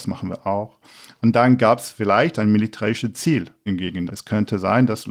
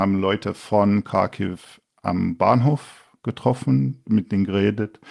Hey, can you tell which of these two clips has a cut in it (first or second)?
first